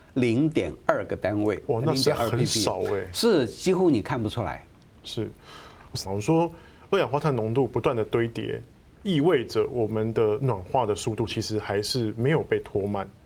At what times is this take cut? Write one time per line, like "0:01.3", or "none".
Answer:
0:06.0